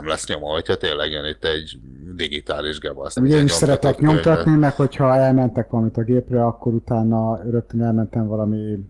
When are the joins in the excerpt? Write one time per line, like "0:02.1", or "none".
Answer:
0:03.2